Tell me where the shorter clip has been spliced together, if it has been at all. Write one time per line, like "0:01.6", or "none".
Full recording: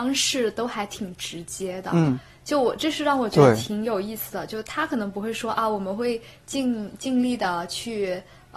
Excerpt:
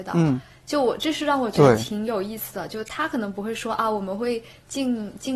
none